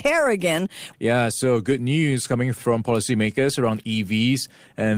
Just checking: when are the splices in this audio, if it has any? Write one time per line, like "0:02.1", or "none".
0:00.9